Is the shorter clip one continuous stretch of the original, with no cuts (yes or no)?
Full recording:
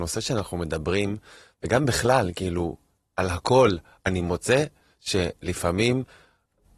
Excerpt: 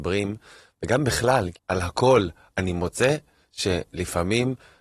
no